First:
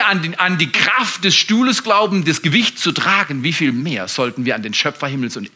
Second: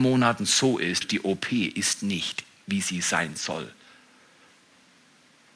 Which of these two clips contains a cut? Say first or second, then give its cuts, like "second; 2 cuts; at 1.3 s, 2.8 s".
second; 1 cut; at 1.0 s